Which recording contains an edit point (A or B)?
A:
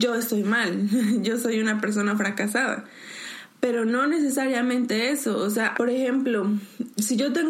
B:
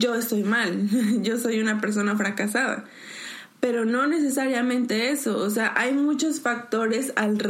A